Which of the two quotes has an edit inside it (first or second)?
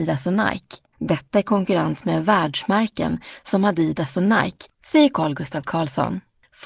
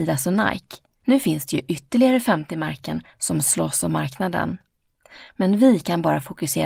first